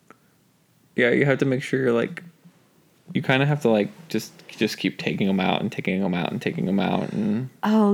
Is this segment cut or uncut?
uncut